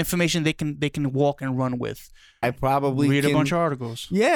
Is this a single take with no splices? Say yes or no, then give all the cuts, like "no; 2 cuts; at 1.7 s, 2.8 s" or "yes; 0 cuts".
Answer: no; 1 cut; at 2.4 s